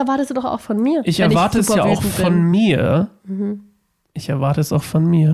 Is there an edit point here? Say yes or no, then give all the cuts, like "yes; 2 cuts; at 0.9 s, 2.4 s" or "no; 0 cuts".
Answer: no; 0 cuts